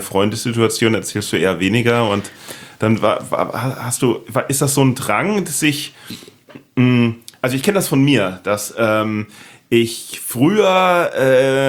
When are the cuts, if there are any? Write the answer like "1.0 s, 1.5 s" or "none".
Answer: none